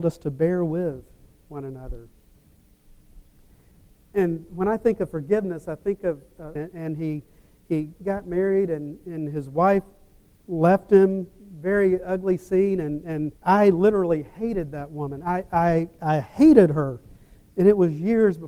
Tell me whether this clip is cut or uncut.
cut